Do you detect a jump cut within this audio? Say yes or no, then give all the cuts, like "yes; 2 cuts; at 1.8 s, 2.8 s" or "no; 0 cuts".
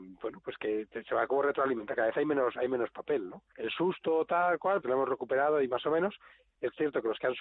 yes; 2 cuts; at 3.5 s, 4.8 s